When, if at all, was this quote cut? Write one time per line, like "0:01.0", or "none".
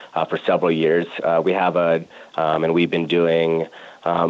0:02.3